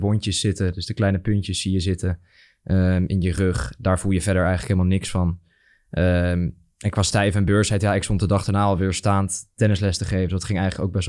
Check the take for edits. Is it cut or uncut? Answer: uncut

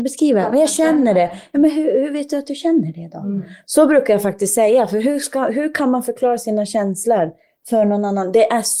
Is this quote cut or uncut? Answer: uncut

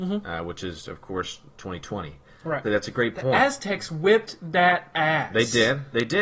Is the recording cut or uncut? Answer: cut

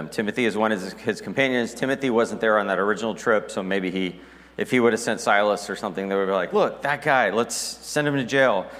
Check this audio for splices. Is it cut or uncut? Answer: uncut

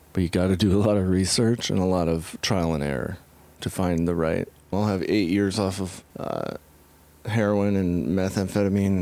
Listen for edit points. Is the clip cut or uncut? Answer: cut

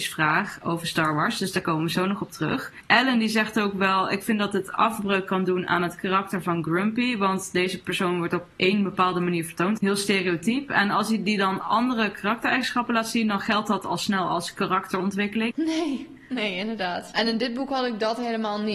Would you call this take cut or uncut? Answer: cut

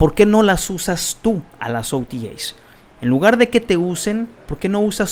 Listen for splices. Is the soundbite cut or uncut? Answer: uncut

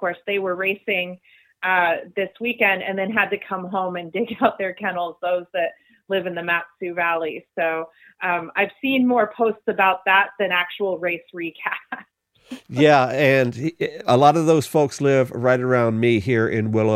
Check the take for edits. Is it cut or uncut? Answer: uncut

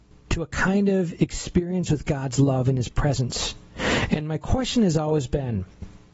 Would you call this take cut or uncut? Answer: uncut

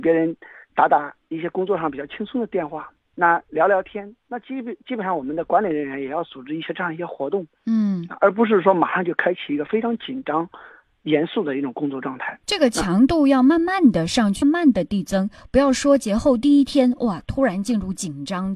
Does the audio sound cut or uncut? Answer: cut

